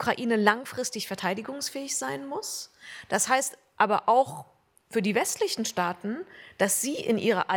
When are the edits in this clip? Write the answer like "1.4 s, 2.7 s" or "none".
none

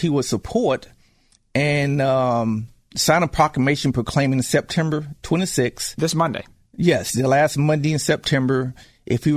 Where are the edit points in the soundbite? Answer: none

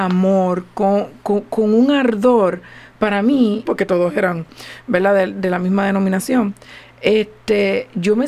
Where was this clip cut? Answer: 3.7 s

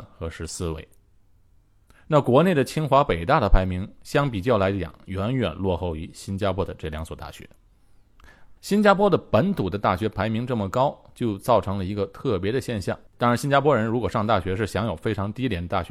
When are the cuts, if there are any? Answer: 8.6 s, 13.1 s

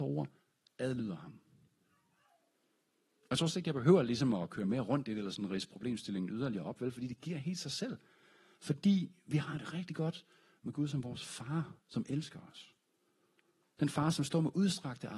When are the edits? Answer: none

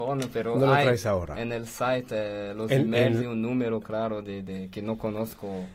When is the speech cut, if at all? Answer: none

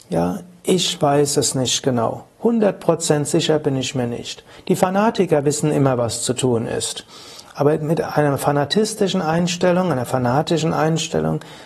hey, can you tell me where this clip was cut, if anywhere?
none

